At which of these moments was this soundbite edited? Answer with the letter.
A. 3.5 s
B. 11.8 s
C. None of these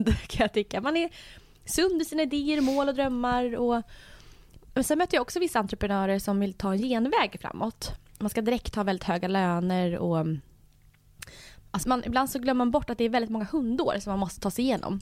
B